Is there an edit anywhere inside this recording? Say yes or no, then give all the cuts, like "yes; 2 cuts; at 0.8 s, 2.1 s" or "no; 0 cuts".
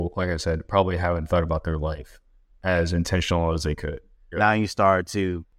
yes; 1 cut; at 4.3 s